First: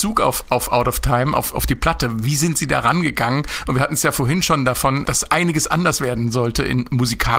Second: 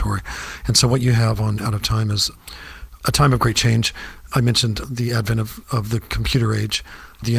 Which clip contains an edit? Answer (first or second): first